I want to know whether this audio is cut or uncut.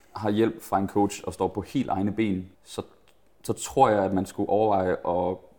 cut